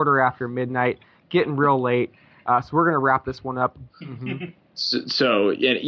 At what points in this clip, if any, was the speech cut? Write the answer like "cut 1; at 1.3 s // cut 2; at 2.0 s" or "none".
cut 1; at 3.9 s